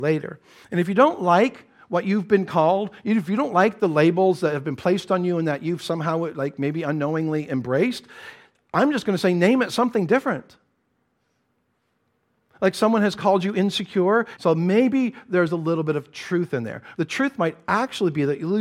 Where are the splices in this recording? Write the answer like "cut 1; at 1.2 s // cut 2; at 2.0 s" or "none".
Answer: cut 1; at 14.4 s // cut 2; at 16.9 s